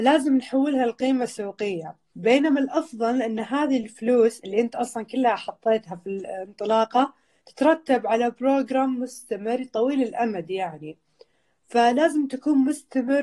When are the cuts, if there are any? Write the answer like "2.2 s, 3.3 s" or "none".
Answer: 2.1 s